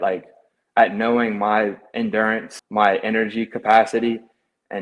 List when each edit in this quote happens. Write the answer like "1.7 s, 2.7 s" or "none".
2.6 s